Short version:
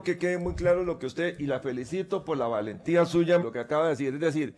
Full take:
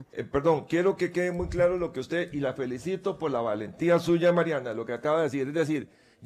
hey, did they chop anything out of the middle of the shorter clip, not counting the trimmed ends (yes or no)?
yes